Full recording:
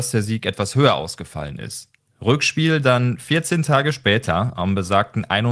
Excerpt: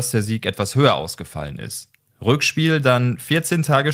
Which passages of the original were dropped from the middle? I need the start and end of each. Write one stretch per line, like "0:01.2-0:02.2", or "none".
none